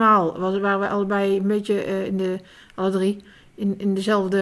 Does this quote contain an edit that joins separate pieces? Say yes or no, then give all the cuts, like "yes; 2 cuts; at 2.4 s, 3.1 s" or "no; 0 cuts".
no; 0 cuts